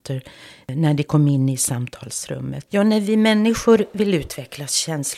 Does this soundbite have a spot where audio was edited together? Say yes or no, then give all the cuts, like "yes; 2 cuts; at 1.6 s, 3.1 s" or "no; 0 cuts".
yes; 1 cut; at 2.7 s